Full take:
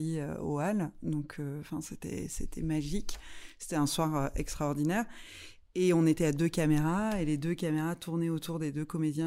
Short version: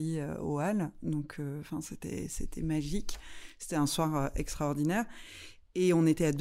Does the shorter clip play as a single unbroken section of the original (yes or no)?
yes